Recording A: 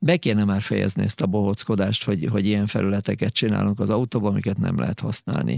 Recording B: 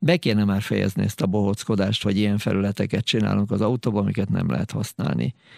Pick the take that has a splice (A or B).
B